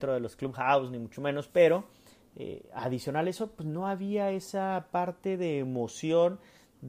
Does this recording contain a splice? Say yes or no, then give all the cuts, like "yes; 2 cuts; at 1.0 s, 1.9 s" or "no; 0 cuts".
no; 0 cuts